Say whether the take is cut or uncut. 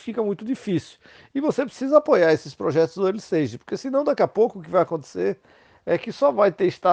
uncut